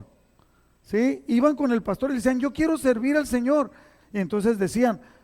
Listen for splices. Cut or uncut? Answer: cut